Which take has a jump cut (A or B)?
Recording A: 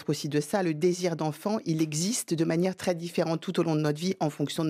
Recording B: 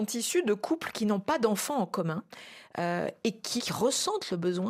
B